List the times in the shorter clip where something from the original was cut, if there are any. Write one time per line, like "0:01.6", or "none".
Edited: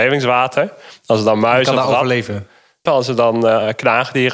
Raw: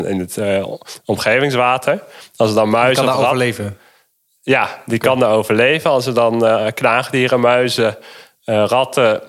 0:02.9